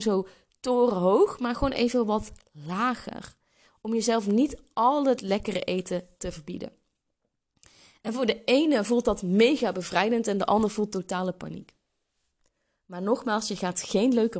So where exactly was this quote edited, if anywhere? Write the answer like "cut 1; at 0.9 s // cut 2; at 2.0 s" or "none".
none